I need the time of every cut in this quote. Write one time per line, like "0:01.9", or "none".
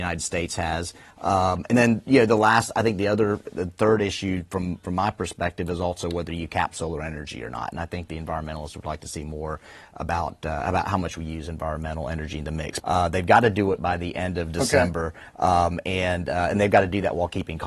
0:12.8